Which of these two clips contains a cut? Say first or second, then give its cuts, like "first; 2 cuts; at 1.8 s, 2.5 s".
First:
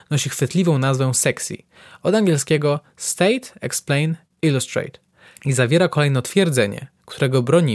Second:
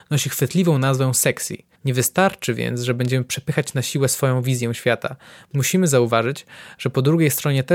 second; 1 cut; at 1.7 s